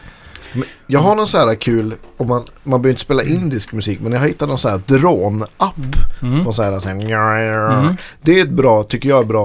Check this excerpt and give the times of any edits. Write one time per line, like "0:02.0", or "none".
none